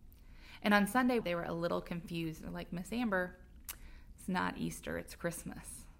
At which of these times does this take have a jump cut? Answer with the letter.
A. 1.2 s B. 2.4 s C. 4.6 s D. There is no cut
A